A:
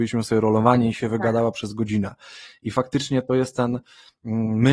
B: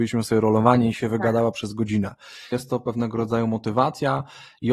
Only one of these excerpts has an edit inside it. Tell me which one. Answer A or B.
B